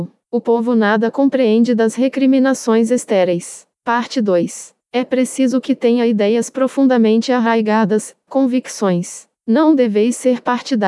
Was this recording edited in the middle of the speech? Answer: yes; 1 cut; at 3.7 s

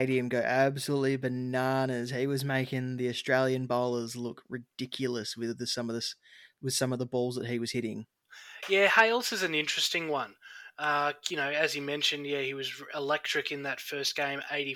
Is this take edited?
no; 0 cuts

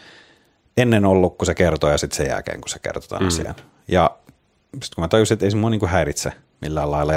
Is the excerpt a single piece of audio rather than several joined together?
yes; 0 cuts

